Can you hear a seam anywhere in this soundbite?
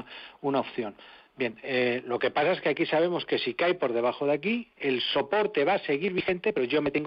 no; 0 cuts

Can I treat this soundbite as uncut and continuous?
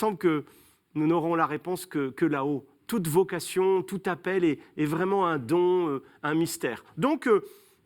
yes; 0 cuts

